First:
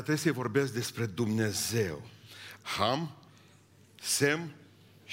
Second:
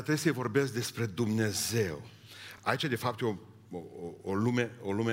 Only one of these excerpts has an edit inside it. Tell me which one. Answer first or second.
first